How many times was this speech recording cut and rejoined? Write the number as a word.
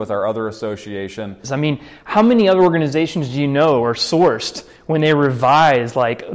one